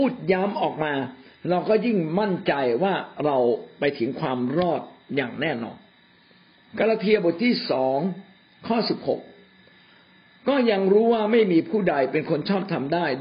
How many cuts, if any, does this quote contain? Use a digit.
0